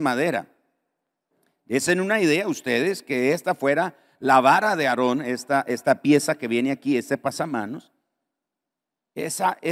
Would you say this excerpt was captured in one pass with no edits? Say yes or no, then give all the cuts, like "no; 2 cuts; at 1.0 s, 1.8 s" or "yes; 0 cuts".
yes; 0 cuts